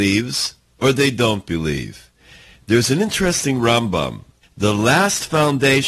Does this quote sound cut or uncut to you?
cut